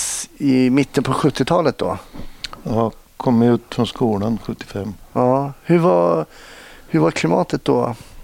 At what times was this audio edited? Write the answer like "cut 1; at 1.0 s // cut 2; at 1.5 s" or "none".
none